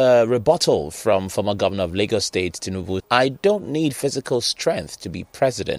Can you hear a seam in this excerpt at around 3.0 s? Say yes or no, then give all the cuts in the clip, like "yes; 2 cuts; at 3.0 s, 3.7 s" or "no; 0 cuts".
yes; 1 cut; at 3.0 s